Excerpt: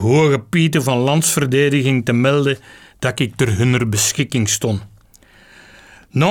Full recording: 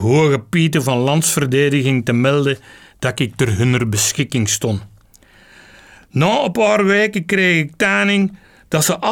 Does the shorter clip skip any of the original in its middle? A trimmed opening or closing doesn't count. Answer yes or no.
no